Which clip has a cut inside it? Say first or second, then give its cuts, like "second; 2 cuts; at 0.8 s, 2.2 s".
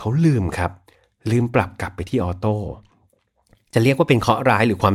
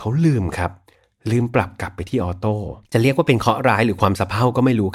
second; 1 cut; at 2.8 s